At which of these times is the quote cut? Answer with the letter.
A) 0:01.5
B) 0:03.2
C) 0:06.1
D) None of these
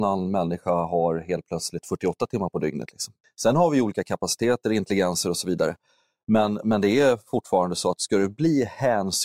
B